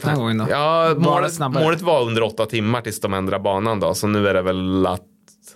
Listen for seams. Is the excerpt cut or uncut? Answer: uncut